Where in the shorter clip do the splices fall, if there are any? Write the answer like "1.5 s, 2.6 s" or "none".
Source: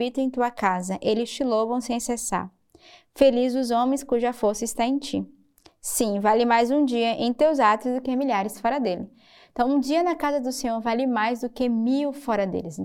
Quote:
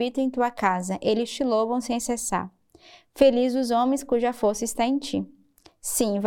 none

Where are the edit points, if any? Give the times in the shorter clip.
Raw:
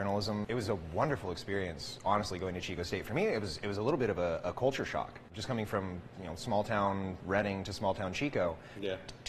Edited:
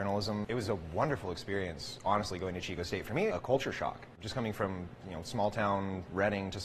3.3 s

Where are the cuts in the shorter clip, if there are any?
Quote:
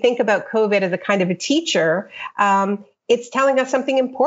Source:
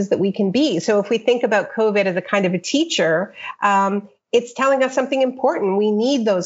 none

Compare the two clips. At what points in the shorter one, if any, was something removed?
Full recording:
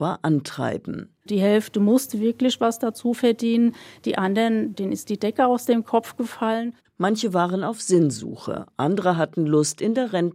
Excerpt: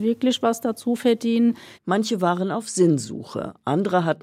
1.7 s

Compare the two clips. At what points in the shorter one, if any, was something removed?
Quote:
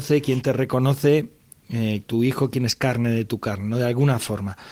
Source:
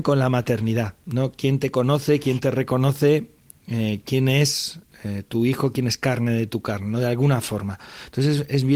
2.0 s

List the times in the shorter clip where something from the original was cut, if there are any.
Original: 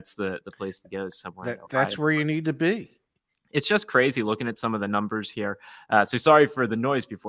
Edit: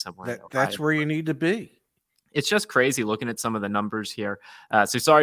none

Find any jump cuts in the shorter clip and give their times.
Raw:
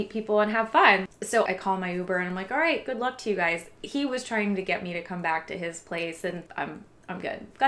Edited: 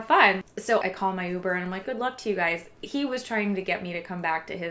1.8 s

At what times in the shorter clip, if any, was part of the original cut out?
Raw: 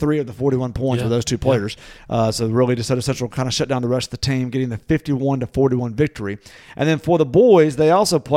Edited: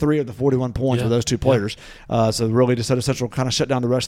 none

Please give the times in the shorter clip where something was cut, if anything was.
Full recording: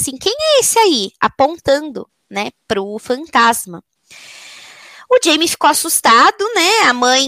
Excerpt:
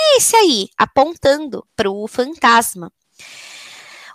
1.7 s

